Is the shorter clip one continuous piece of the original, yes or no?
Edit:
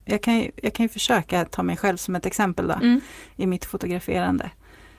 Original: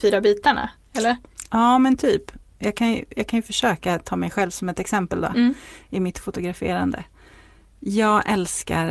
yes